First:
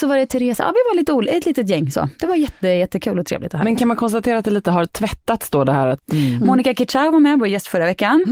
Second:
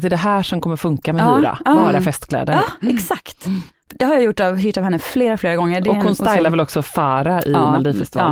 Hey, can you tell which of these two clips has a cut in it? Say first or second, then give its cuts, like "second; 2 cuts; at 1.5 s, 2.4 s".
first; 1 cut; at 6.0 s